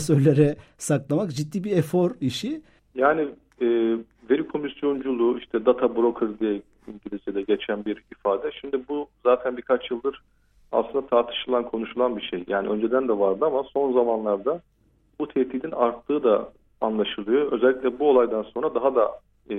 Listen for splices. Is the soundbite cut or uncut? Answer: cut